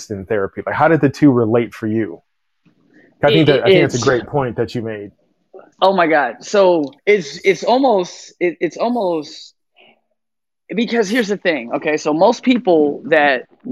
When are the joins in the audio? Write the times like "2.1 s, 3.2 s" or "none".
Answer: 5.7 s, 7.0 s